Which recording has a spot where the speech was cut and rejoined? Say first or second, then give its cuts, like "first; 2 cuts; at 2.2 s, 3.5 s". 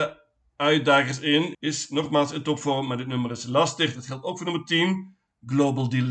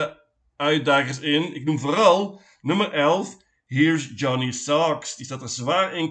first; 1 cut; at 1.5 s